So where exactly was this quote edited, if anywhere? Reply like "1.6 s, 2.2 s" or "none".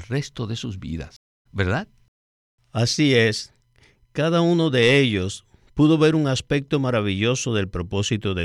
1.5 s